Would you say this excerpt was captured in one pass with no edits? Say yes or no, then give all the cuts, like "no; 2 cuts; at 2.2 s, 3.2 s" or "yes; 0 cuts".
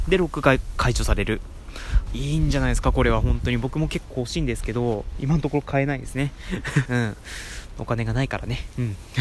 no; 2 cuts; at 2.1 s, 6.8 s